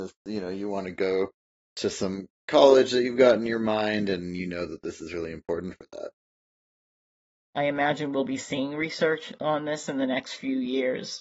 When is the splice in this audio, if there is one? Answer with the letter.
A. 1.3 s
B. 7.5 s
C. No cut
B